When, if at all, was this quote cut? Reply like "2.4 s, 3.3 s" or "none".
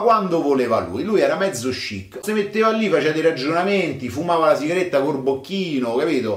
2.2 s